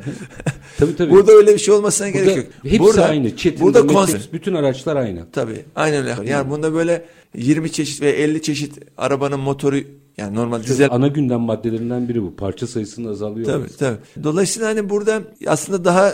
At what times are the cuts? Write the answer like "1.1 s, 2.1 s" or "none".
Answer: 4.1 s, 6.2 s, 10.9 s